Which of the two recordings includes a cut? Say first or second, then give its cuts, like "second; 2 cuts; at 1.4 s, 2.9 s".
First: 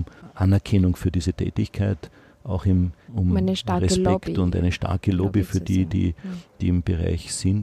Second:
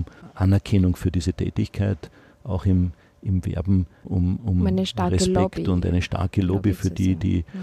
first; 1 cut; at 3.1 s